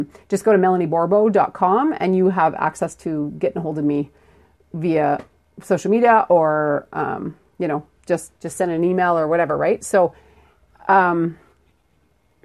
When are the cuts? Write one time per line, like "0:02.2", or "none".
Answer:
0:08.3